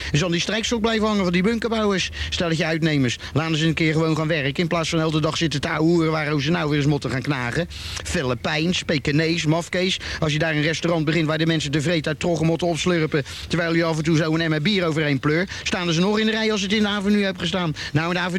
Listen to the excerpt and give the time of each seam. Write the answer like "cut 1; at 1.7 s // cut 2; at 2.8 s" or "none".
none